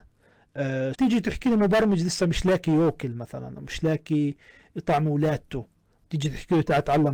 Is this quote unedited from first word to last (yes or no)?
no